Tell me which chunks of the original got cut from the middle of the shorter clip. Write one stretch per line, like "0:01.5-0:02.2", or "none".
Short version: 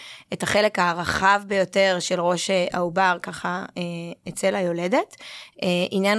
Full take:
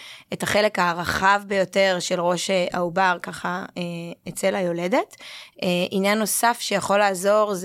none